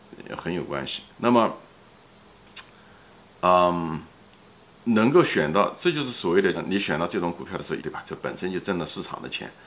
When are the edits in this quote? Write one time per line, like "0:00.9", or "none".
0:01.1
0:06.5
0:07.8